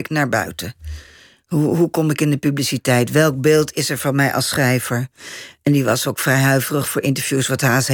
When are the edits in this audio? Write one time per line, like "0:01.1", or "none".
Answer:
none